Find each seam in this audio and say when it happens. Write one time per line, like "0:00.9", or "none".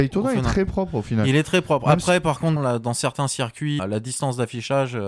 0:02.6
0:03.8